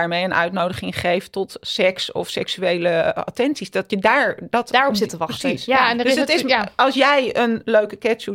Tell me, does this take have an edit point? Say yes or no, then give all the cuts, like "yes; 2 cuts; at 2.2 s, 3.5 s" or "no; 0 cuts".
no; 0 cuts